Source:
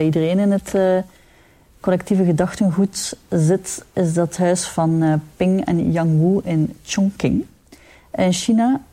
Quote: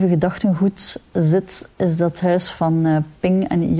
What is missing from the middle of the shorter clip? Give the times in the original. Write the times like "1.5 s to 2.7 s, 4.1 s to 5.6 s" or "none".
none